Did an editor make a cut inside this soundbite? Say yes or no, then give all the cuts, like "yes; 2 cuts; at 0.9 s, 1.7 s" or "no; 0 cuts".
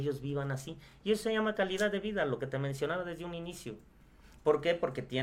no; 0 cuts